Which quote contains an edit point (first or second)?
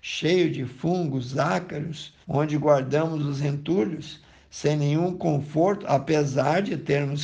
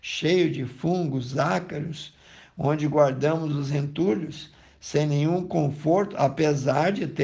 first